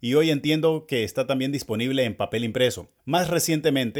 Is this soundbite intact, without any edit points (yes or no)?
no